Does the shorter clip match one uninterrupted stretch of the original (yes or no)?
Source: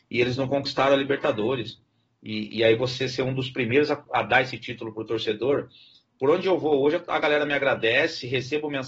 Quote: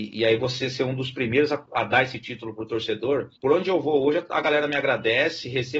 no